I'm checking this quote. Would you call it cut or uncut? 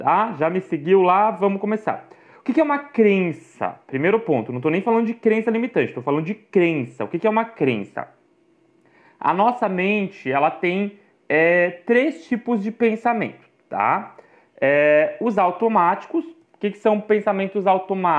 uncut